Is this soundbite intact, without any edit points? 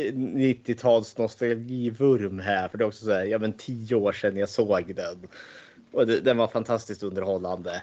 yes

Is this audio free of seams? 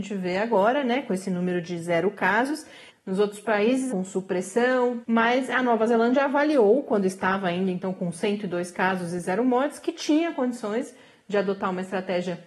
no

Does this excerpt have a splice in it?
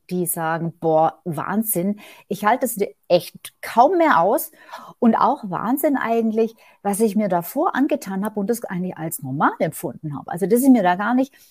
no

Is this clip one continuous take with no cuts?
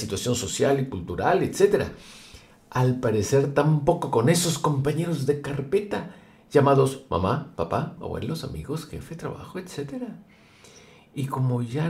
no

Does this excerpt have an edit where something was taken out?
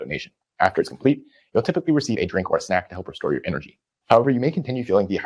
no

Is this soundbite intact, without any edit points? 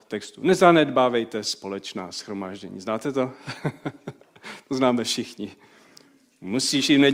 yes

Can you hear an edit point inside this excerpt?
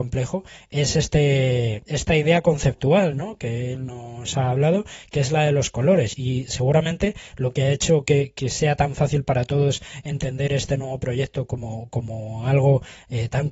yes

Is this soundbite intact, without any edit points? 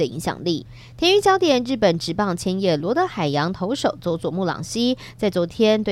yes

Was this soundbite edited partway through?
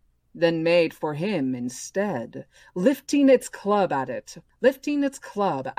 yes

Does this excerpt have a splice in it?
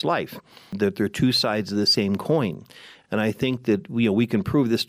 no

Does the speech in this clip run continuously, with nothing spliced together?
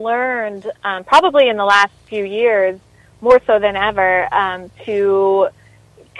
yes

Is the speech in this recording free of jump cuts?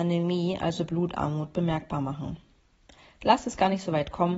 yes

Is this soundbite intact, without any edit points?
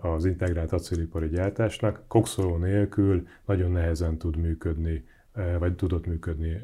yes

